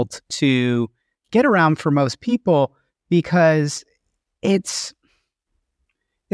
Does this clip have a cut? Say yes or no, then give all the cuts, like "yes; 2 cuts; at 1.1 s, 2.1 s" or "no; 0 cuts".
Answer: no; 0 cuts